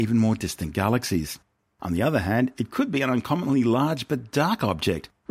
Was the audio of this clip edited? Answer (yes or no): yes